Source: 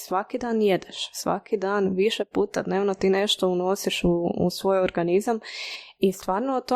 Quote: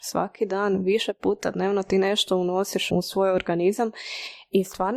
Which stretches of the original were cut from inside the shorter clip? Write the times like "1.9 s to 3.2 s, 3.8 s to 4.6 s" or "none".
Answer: 4.0 s to 4.4 s